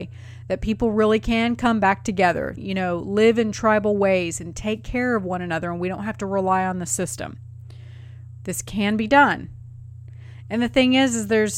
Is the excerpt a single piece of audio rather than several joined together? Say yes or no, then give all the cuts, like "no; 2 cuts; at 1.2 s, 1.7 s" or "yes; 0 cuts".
no; 1 cut; at 2.6 s